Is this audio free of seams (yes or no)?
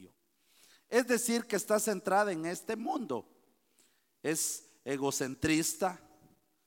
yes